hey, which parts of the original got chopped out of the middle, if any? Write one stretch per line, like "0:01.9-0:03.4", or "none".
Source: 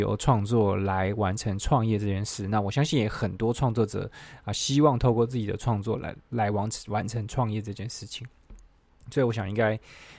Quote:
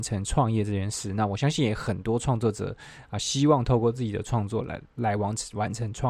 none